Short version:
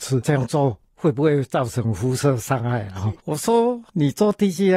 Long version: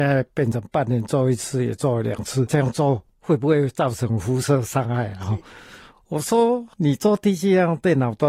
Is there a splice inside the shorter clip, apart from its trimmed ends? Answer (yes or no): yes